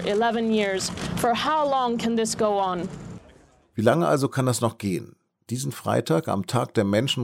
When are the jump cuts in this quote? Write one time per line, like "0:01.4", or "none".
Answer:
none